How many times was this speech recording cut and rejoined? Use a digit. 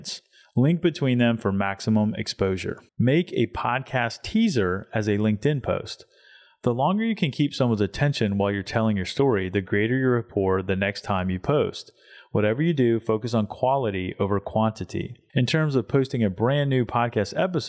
2